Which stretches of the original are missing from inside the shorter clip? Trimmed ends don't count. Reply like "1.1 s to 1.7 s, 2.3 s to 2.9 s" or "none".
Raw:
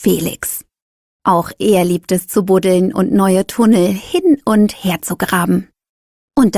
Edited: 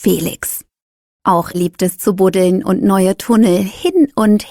1.5 s to 1.8 s